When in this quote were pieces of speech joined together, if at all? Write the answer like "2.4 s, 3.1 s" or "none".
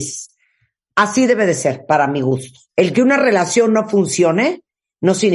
2.7 s